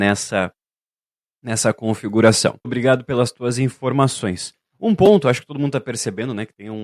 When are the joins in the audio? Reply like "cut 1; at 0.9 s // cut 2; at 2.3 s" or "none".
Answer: cut 1; at 2.6 s